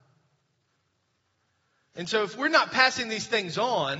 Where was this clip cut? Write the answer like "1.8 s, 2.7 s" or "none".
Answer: 1.9 s